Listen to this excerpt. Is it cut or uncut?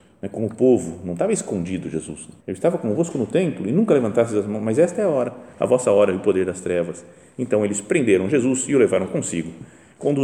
cut